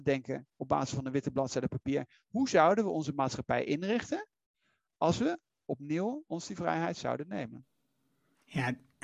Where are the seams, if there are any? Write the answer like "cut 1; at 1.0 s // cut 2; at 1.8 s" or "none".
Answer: none

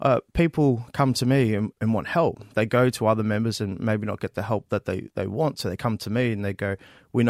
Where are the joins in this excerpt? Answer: cut 1; at 1.7 s

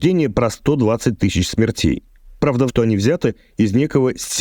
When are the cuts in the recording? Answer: cut 1; at 2.7 s

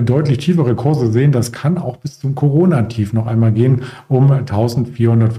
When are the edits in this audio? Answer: none

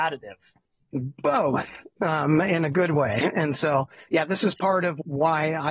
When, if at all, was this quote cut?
none

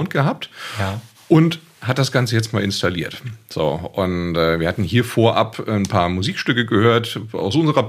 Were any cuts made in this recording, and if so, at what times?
none

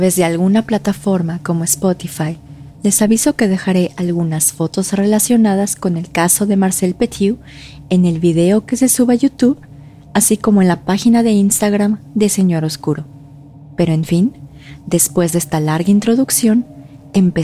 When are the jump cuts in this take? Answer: cut 1; at 2.7 s

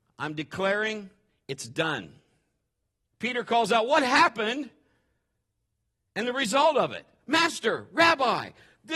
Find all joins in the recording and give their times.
cut 1; at 3.1 s

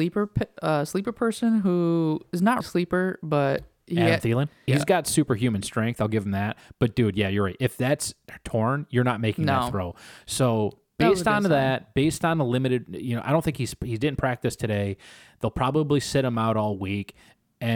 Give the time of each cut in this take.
cut 1; at 2.6 s // cut 2; at 4.7 s

